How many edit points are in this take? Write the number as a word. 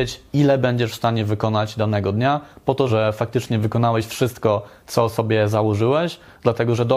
one